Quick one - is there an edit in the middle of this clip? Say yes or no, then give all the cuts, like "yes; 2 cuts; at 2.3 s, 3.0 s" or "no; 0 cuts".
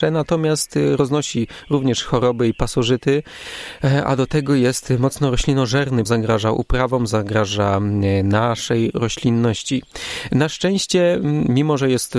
yes; 1 cut; at 6.0 s